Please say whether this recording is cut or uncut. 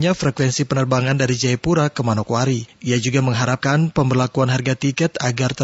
uncut